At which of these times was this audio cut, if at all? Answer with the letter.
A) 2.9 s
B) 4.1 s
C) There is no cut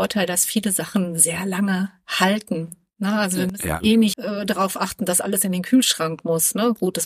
B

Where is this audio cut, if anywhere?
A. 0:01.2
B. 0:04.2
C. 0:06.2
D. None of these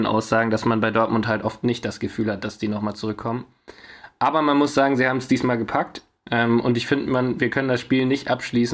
C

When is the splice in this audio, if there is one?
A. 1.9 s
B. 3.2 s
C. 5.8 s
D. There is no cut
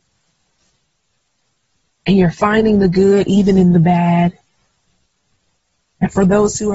C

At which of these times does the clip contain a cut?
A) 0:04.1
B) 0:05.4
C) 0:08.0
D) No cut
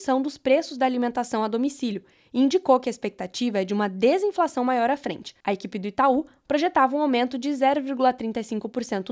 D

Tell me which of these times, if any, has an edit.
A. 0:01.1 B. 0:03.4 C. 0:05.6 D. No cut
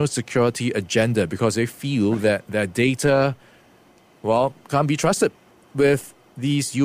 D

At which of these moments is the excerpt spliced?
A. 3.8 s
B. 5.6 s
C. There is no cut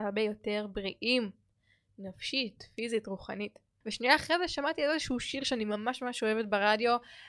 A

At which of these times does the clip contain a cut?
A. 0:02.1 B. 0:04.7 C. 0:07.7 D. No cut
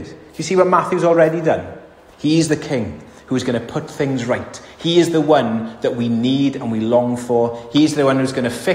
A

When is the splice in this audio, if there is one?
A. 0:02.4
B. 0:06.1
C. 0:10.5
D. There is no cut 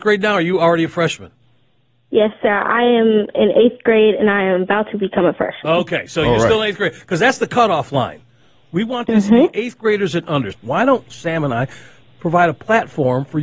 C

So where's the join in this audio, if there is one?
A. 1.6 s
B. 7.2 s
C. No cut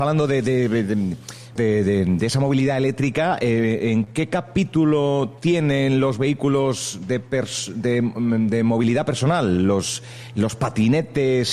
A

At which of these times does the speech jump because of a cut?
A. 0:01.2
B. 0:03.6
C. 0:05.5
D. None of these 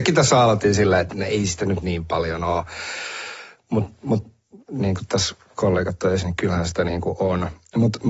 C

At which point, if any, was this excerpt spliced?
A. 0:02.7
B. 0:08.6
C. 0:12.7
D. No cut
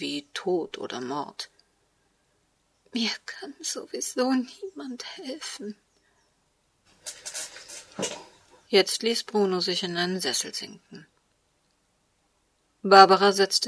A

